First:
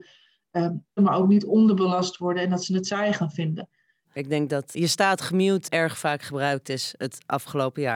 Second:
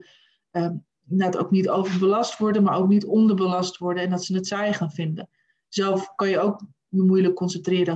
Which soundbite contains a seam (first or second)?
first